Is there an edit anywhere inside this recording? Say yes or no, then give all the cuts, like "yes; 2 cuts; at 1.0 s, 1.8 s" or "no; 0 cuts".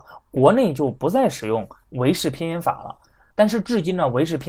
no; 0 cuts